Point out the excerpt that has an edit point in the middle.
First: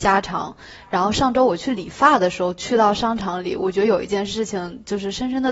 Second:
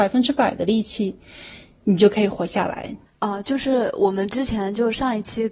second; 1 cut; at 3.1 s

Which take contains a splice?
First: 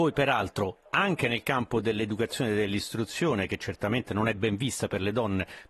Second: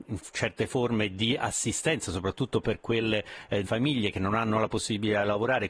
second; 1 cut; at 3.6 s

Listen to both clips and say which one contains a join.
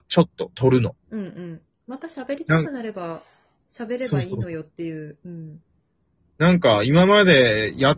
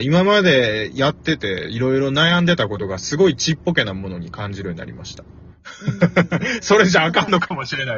first; 1 cut; at 1.0 s

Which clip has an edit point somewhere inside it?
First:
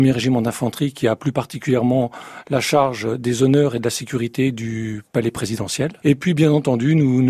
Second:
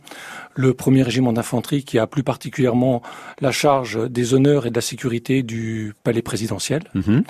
first; 1 cut; at 6.0 s

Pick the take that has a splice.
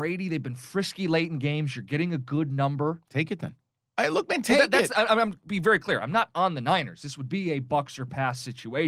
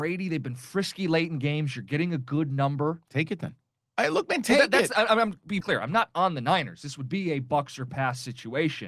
second; 1 cut; at 5.6 s

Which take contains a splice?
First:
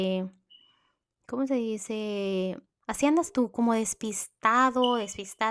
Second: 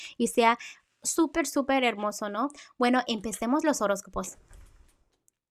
first; 1 cut; at 2.7 s

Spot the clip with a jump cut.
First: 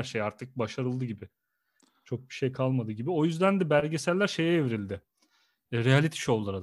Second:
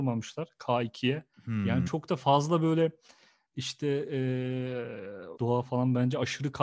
second; 2 cuts; at 1.3 s, 5.4 s

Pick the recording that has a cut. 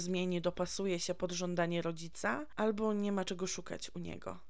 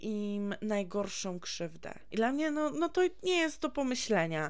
second; 1 cut; at 2.1 s

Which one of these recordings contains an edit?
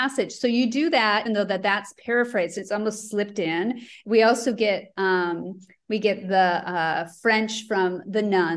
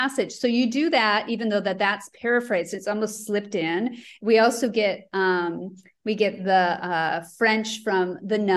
first; 1 cut; at 1.3 s

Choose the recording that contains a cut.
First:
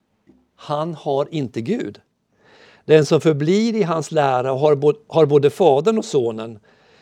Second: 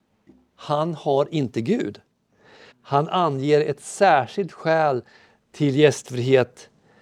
second; 1 cut; at 2.7 s

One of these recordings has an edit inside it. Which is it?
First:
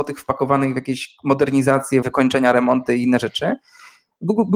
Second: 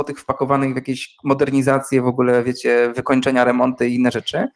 first; 1 cut; at 2.0 s

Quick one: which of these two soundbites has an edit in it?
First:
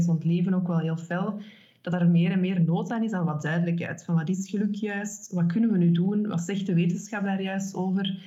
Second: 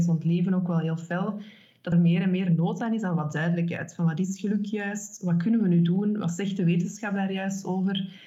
second; 1 cut; at 1.9 s

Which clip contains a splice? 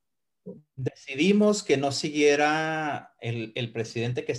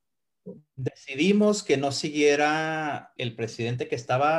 second; 1 cut; at 3.2 s

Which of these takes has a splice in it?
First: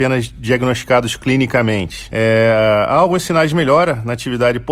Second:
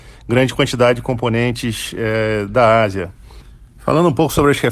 first; 1 cut; at 2.1 s

